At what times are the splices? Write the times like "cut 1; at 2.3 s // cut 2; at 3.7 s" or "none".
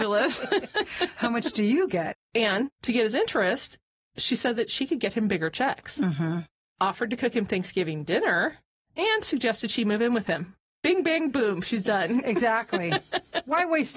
none